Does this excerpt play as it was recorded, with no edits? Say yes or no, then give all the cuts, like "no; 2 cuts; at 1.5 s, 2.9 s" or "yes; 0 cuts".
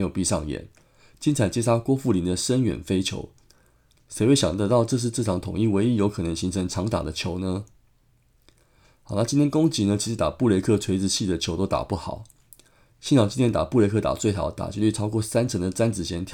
yes; 0 cuts